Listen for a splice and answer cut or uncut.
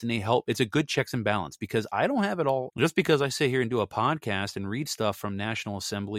cut